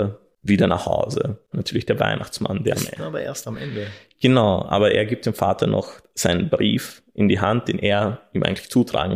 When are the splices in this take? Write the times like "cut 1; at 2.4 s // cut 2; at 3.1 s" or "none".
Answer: cut 1; at 1.5 s

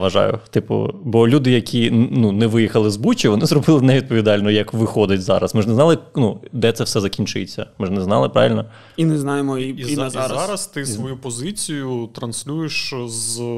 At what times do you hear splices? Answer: none

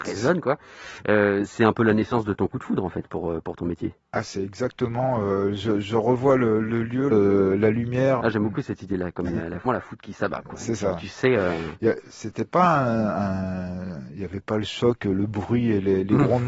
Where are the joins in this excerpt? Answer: cut 1; at 7.1 s // cut 2; at 8.2 s // cut 3; at 9.6 s

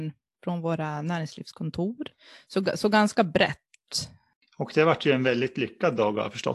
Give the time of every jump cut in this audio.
none

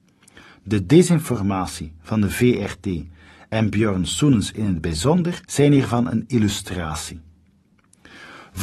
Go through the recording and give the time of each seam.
cut 1; at 5.4 s

